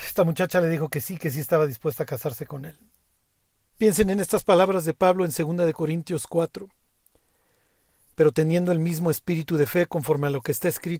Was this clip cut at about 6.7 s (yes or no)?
no